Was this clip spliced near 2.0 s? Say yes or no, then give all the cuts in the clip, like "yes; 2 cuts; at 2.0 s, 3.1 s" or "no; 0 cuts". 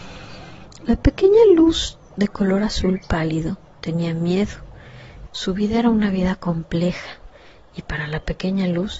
yes; 2 cuts; at 2.0 s, 5.3 s